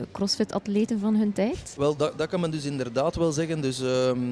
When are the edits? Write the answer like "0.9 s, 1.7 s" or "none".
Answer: none